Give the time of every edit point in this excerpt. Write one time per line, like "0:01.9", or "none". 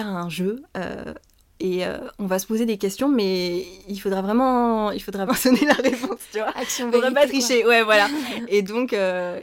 0:03.8
0:05.3